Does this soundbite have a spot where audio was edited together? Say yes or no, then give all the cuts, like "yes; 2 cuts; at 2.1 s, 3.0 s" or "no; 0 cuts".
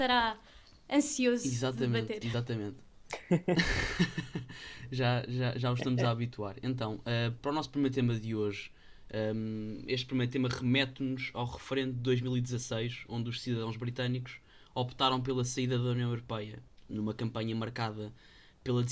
no; 0 cuts